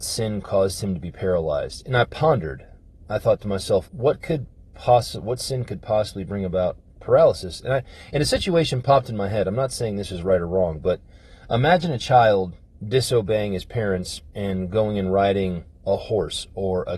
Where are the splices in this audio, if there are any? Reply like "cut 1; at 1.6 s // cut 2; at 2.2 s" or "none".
cut 1; at 3.8 s